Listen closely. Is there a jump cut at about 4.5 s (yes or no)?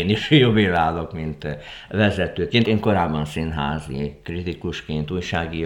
no